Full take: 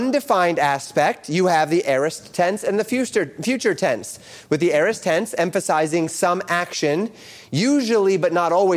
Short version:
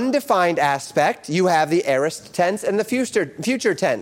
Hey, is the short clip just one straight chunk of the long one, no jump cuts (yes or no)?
yes